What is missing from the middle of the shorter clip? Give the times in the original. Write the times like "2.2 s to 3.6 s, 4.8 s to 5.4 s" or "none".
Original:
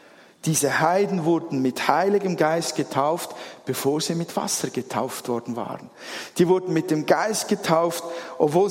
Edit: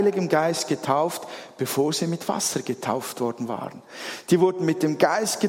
none